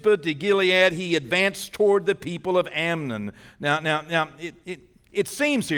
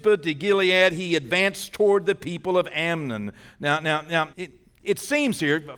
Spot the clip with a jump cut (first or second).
second